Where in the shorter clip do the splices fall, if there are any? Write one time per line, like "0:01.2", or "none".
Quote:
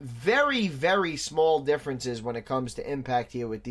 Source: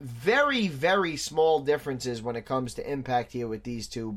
none